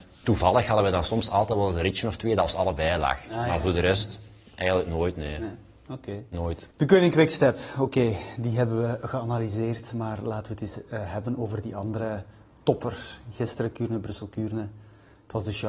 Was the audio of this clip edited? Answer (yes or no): yes